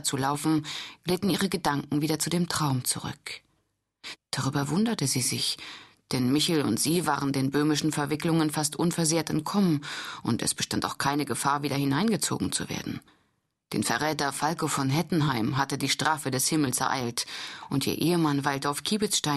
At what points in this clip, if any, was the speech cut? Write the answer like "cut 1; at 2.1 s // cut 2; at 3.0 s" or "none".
cut 1; at 4.1 s